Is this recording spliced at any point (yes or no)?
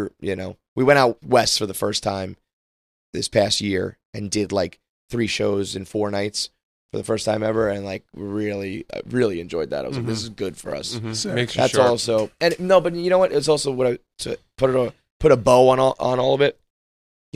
no